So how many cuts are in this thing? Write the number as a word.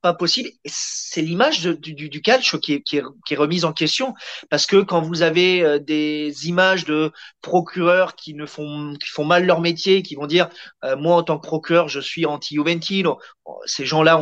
zero